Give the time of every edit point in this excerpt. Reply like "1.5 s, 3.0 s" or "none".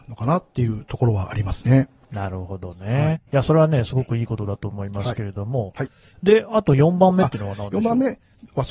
3.1 s